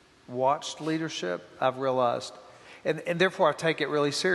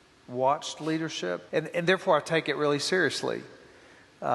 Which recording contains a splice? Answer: second; 1 cut; at 1.5 s

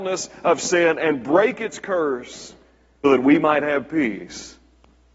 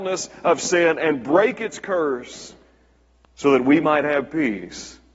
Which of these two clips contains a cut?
first; 1 cut; at 3.0 s

